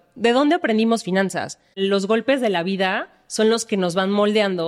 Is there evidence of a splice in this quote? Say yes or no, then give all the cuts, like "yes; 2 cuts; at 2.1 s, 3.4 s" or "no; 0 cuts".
yes; 1 cut; at 1.7 s